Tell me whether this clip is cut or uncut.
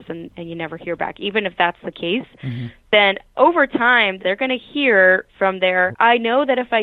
cut